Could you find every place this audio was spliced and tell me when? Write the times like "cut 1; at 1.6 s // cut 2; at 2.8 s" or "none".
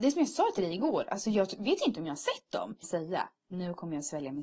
cut 1; at 2.8 s